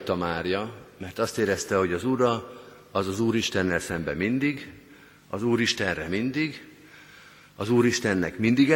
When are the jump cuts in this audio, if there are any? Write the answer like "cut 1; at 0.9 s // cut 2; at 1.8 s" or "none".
none